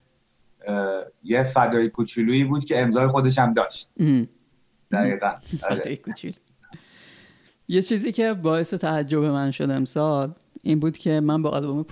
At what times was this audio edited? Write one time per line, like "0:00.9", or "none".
none